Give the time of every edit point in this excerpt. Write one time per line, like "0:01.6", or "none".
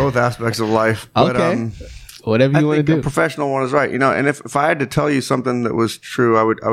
none